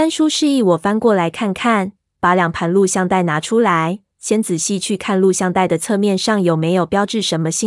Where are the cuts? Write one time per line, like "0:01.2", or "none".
0:02.1